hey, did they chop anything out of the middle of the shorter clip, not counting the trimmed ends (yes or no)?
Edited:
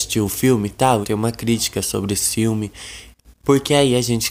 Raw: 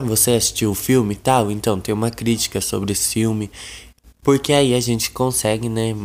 yes